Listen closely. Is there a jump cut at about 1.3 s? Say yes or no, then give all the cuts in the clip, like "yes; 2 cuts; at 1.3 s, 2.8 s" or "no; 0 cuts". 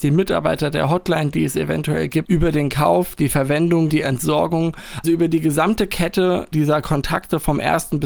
no; 2 cuts; at 3.9 s, 5.0 s